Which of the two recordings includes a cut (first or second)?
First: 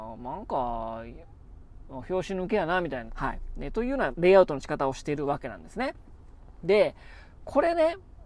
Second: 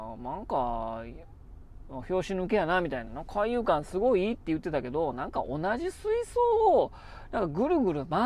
first